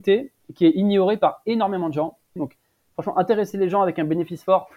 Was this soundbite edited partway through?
yes; 1 cut; at 2.4 s

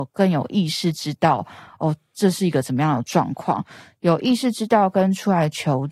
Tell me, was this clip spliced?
no; 0 cuts

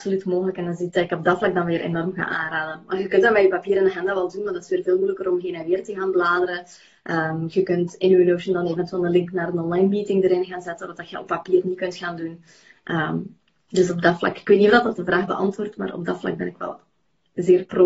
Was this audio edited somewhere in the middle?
no; 0 cuts

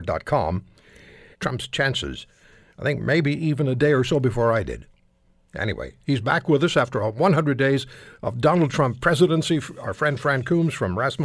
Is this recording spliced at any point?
yes; 1 cut; at 1.3 s

